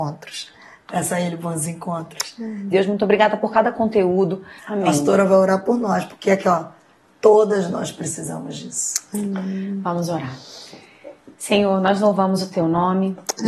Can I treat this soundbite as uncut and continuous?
no; 2 cuts; at 2.7 s, 4.6 s

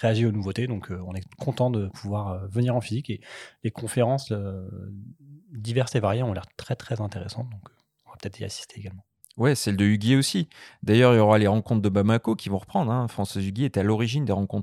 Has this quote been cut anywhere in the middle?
no; 0 cuts

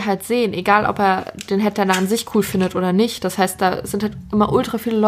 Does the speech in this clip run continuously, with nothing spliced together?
yes; 0 cuts

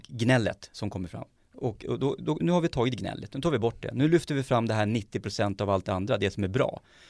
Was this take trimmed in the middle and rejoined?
yes; 1 cut; at 2.4 s

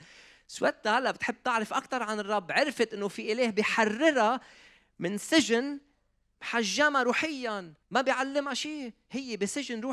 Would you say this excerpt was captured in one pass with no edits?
no; 1 cut; at 7.8 s

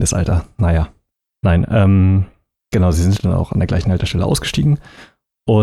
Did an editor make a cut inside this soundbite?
no; 0 cuts

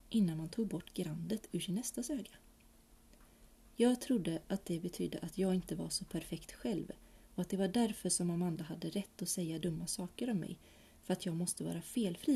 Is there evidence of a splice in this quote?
no; 0 cuts

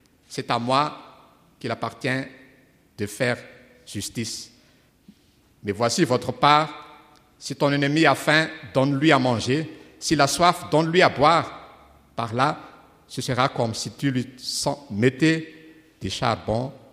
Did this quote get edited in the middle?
no; 0 cuts

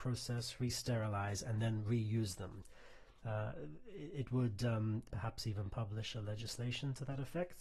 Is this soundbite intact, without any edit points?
no; 2 cuts; at 3.2 s, 5.1 s

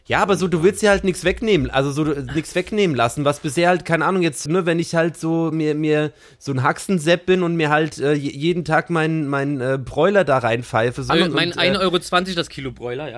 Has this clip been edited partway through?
yes; 2 cuts; at 4.5 s, 11.1 s

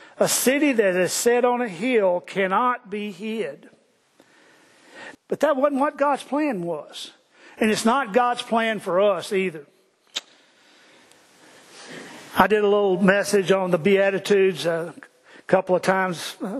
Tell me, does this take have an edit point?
yes; 1 cut; at 5.1 s

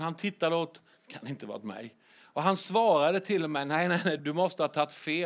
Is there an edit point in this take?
yes; 1 cut; at 4.2 s

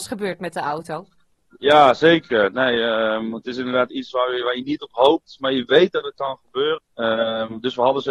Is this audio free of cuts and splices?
no; 1 cut; at 6.8 s

